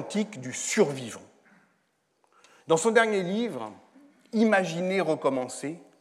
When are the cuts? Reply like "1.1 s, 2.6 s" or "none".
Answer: none